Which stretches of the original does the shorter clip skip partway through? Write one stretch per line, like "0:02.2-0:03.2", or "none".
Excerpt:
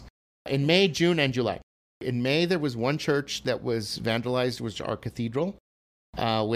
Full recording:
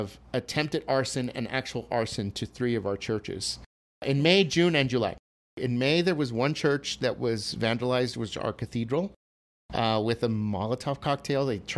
none